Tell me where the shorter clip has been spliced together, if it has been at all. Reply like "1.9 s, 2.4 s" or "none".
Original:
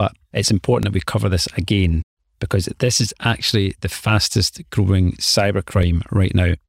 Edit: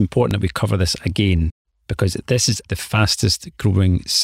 2.6 s

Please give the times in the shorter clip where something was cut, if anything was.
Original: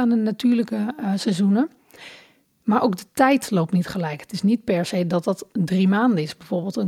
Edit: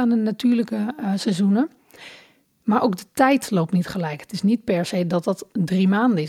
none

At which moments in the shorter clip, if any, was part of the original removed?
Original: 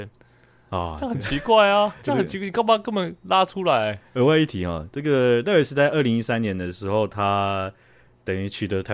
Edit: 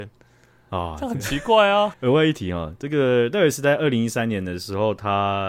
1.9 s

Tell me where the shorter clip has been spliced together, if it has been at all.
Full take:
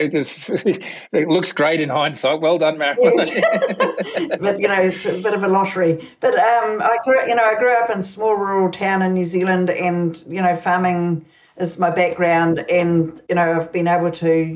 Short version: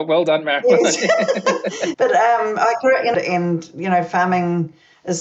1.9 s, 3.1 s

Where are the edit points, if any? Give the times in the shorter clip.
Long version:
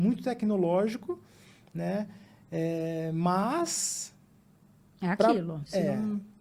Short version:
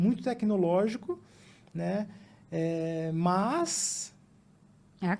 none

